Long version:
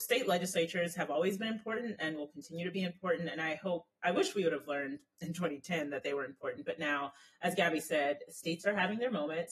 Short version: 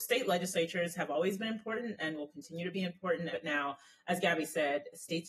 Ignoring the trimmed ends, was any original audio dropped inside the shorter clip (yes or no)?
yes